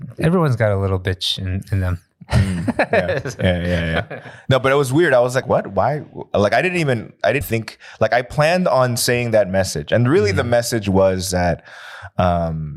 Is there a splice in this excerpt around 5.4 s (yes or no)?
yes